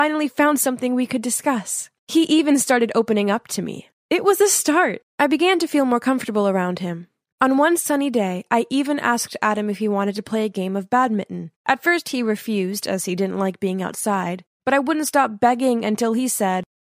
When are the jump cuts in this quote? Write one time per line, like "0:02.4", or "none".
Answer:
none